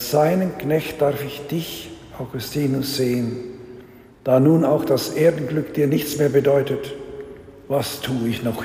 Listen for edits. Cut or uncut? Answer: uncut